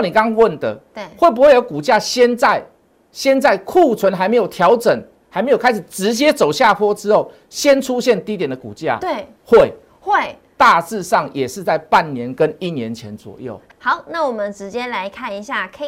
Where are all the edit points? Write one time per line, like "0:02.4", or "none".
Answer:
none